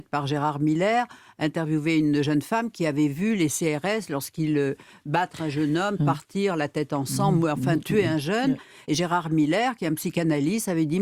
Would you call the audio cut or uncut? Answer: cut